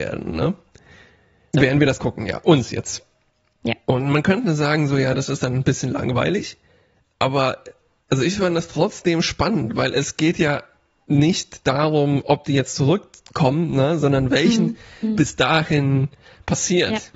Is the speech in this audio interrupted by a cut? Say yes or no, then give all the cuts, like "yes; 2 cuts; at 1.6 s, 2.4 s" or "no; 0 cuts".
yes; 2 cuts; at 1.5 s, 15.2 s